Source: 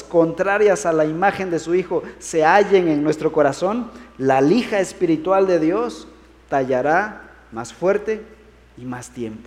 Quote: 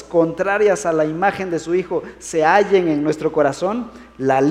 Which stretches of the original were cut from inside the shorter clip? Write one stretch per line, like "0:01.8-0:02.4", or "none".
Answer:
none